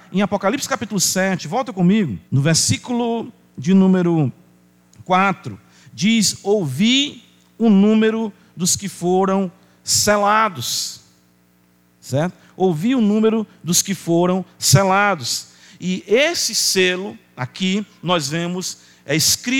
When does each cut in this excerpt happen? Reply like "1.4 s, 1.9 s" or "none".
2.3 s